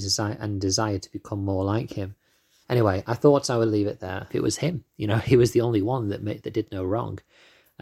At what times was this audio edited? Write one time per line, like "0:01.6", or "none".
0:02.6
0:04.3